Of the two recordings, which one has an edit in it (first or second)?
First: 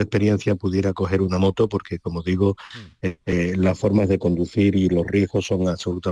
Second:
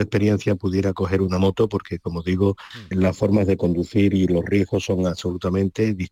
second